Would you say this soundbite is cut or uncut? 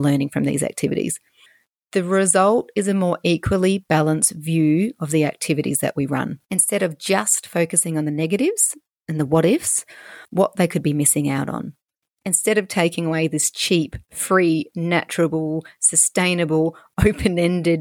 cut